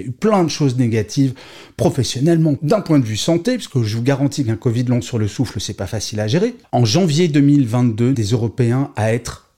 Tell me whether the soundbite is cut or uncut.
cut